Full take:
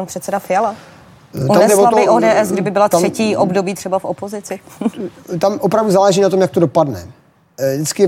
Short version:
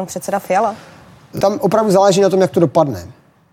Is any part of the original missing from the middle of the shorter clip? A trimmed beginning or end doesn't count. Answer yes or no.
yes